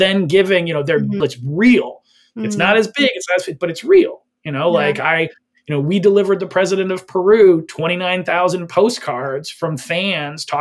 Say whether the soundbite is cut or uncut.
cut